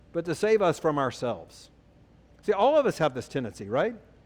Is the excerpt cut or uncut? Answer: uncut